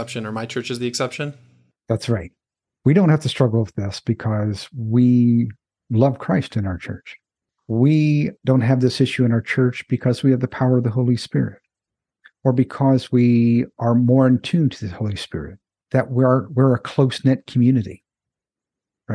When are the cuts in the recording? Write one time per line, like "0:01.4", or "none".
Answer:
none

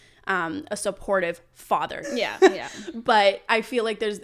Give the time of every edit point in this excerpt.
0:02.0

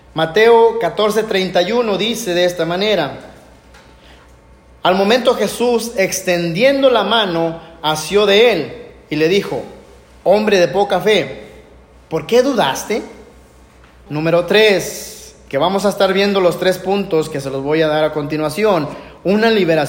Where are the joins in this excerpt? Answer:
0:14.1

